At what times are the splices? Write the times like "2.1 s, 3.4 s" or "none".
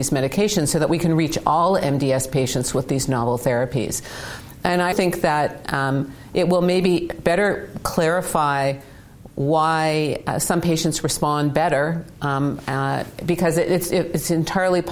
4.9 s